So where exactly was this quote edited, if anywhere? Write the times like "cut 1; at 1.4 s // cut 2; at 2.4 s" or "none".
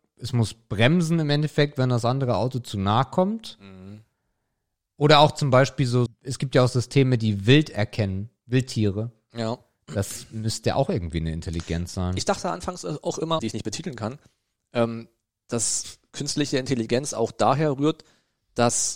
cut 1; at 6.1 s // cut 2; at 13.4 s